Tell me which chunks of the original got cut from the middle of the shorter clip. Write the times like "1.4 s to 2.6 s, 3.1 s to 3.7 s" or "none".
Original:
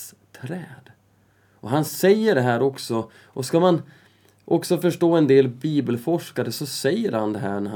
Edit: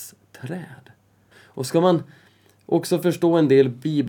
1.3 s to 3.1 s